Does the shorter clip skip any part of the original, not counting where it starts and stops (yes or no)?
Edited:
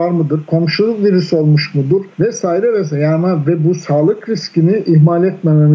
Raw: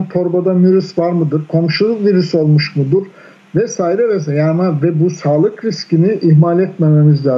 yes